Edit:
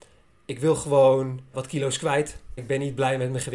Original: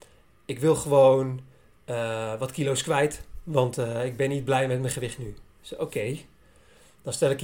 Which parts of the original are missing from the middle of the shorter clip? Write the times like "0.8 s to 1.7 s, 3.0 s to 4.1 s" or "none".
1.5 s to 2.4 s, 3.4 s to 4.1 s